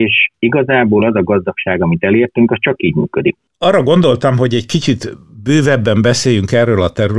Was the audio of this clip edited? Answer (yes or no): yes